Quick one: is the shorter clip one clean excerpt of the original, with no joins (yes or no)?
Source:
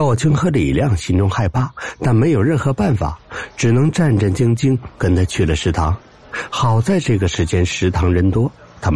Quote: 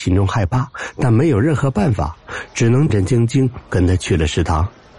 no